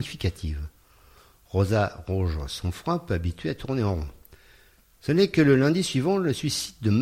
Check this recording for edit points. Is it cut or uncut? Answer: uncut